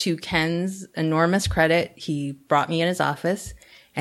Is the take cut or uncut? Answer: uncut